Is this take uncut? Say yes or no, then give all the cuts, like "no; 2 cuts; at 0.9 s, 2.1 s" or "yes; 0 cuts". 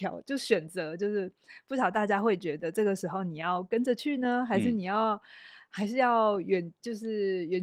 yes; 0 cuts